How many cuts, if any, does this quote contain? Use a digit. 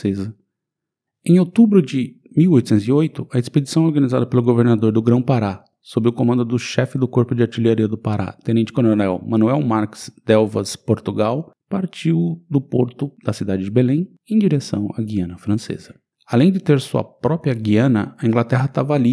2